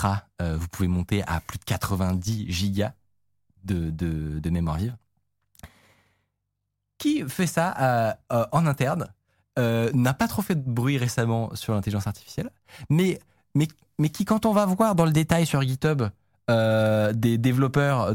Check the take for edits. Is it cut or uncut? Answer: uncut